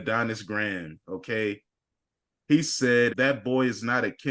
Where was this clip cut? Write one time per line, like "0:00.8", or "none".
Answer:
0:03.1